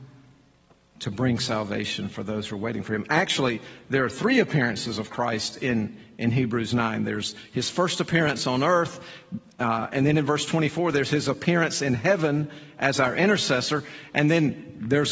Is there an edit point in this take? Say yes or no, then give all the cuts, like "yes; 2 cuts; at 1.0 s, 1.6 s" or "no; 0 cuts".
no; 0 cuts